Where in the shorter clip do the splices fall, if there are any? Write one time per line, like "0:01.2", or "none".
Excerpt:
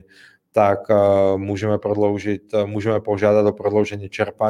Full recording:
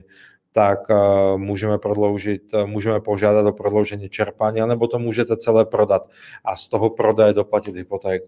none